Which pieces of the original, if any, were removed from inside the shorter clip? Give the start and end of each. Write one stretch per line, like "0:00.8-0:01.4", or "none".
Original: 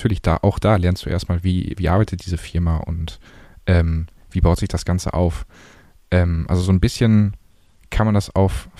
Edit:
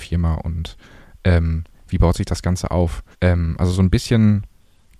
0:05.5-0:06.0